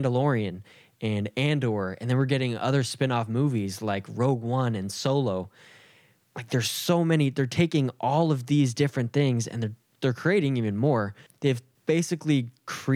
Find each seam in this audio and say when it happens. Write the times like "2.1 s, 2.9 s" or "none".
11.3 s

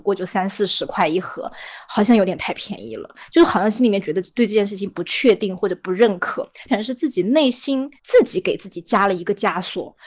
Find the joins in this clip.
6.7 s, 8.0 s

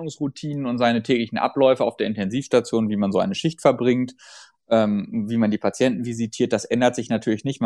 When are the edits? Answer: none

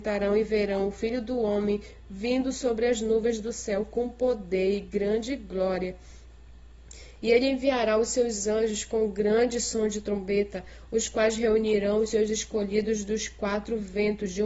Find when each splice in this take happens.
none

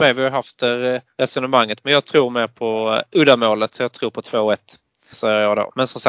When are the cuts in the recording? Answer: 5.1 s

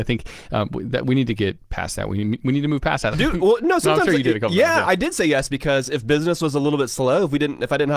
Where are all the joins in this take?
3.1 s

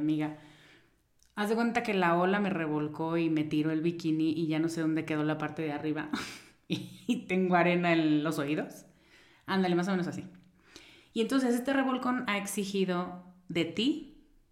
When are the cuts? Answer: none

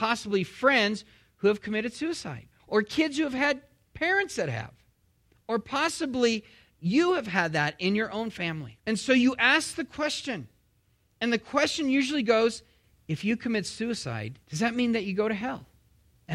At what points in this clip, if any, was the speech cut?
2.6 s, 8.8 s, 14.4 s

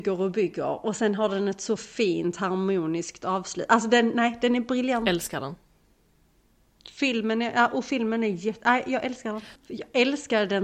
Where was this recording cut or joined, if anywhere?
9.6 s

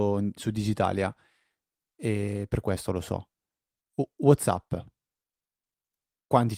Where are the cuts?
none

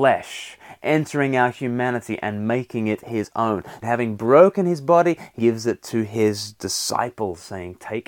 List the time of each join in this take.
3.8 s, 5.4 s

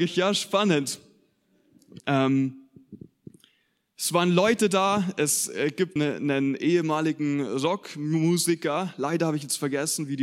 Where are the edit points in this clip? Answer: 2.0 s, 6.0 s

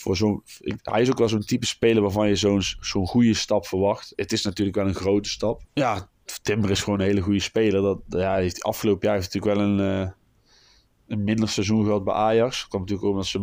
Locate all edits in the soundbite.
4.1 s, 5.6 s

